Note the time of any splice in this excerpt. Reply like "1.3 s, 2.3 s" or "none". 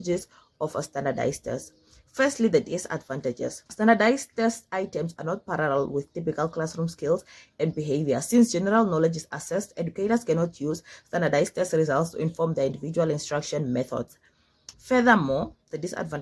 3.7 s, 14.7 s